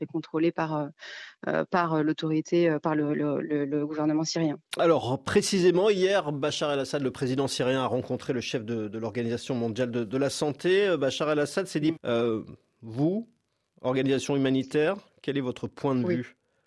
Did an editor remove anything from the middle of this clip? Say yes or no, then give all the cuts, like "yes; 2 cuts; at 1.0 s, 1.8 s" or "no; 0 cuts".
yes; 1 cut; at 12.0 s